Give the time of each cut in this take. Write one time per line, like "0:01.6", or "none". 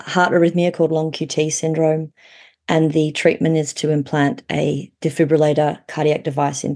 none